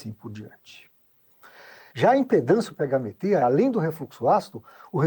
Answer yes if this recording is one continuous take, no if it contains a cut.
no